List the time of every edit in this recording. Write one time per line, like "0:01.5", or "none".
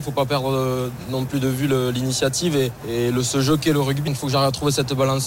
0:04.1